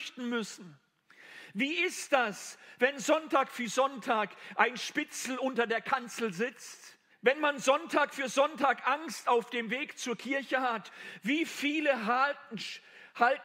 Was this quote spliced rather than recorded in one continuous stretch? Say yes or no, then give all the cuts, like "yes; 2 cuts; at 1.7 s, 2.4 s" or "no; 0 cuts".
yes; 2 cuts; at 7.1 s, 11.2 s